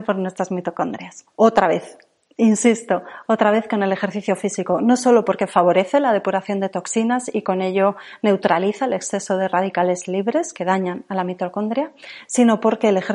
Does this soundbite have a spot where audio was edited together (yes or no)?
yes